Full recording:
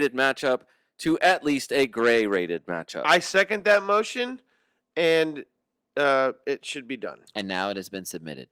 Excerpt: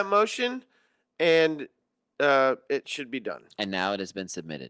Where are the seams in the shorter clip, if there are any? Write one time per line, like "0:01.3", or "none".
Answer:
none

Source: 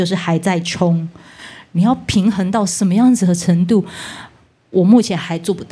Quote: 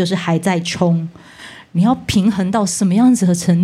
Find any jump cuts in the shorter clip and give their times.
none

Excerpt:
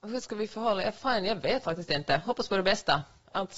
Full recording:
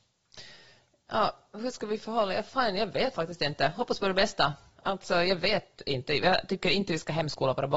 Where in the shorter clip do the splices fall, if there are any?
none

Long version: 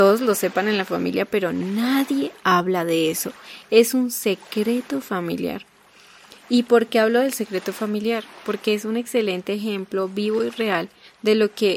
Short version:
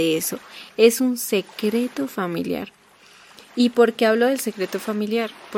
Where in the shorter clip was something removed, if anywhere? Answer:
none

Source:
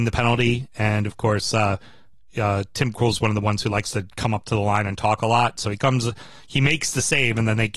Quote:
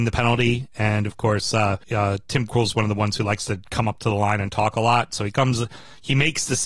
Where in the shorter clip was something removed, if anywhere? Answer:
0:01.8

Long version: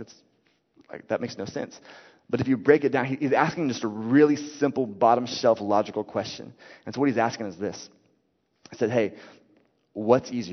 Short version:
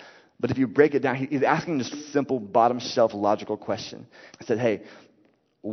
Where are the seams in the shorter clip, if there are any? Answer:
0:01.9
0:04.3

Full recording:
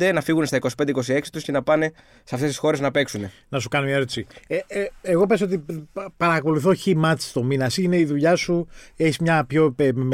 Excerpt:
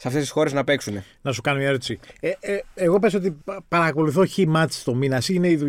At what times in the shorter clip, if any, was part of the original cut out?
0:03.4

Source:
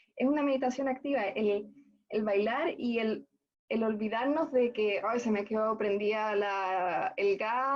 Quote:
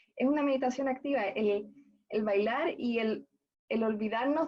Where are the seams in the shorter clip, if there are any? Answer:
none

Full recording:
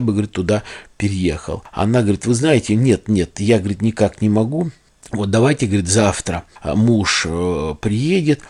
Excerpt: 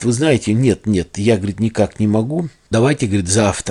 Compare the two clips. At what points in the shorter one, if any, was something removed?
0:02.7

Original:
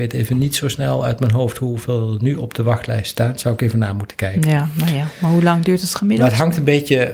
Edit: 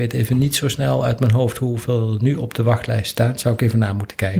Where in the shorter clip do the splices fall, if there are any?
none

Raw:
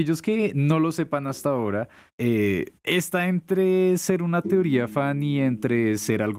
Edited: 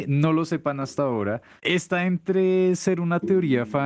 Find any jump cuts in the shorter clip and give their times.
0:01.6

